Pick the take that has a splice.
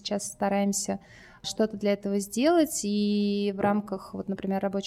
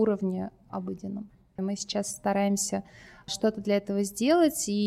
second; 1 cut; at 1.6 s

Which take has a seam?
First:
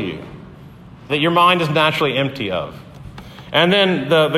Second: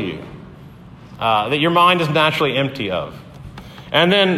first; 1 cut; at 1.1 s

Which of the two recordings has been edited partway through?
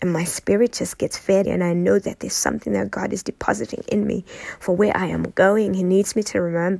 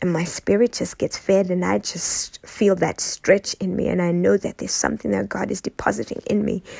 first; 1 cut; at 1.4 s

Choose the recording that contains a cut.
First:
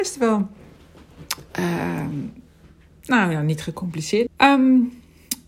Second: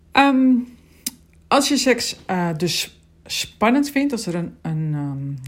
first; 1 cut; at 4.3 s

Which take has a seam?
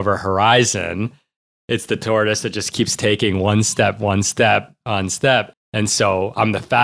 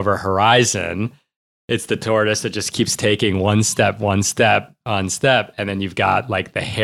first; 1 cut; at 5.5 s

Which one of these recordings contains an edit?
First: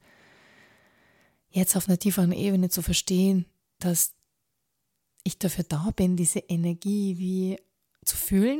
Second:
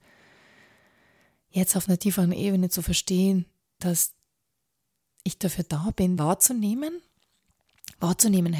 second; 1 cut; at 6.2 s

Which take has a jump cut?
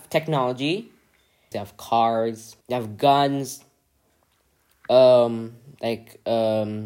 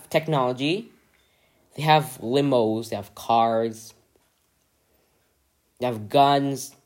first; 2 cuts; at 1.5 s, 2.6 s

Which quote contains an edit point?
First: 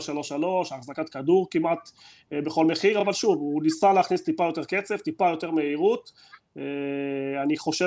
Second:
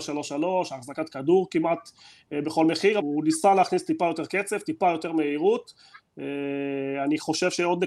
second; 1 cut; at 3.0 s

